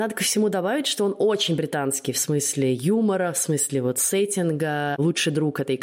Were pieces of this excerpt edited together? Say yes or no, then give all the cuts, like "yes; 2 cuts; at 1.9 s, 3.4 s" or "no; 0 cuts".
no; 0 cuts